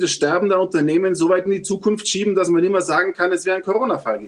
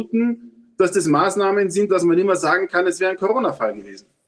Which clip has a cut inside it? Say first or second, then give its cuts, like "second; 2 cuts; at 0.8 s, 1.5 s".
second; 1 cut; at 1.9 s